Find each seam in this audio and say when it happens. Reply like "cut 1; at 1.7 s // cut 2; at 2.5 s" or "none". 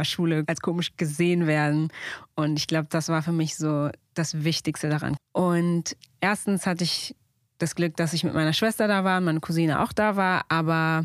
cut 1; at 5.2 s

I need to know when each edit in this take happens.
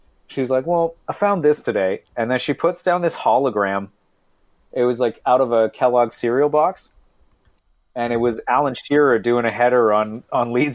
none

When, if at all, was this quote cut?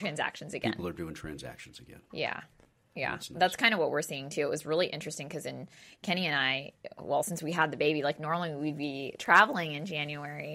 none

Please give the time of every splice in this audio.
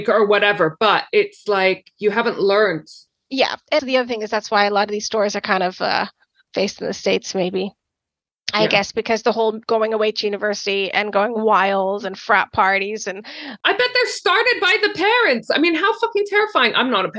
cut 1; at 3.8 s

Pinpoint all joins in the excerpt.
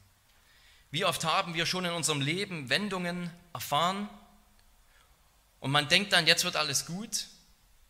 none

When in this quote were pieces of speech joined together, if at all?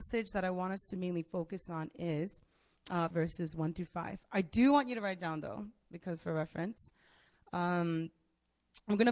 cut 1; at 3.1 s

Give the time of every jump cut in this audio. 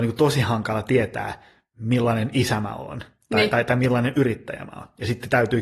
none

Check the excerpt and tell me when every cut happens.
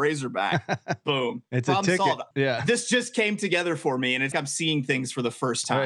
cut 1; at 2.3 s // cut 2; at 4.3 s

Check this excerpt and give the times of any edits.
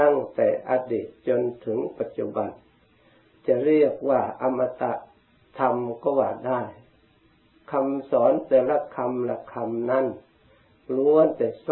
none

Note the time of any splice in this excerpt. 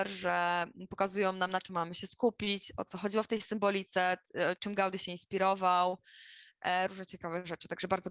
cut 1; at 6.9 s

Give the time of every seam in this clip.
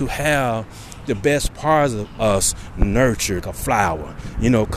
cut 1; at 3.4 s

